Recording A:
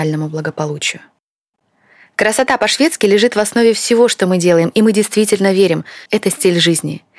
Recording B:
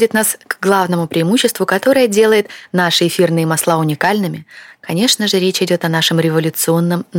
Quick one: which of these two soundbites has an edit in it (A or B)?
A